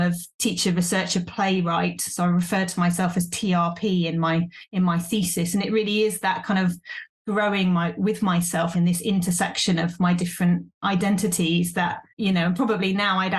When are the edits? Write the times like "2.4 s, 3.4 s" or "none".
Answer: 8.7 s, 12.1 s